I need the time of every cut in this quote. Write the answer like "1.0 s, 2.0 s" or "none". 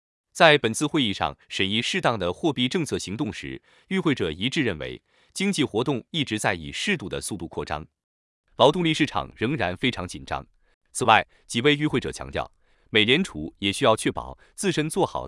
10.7 s, 12.7 s